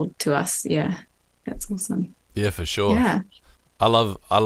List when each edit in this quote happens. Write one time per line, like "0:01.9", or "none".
0:02.2